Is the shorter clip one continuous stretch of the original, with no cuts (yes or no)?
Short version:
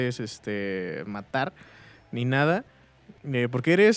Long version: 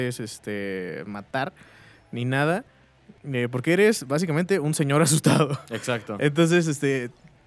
yes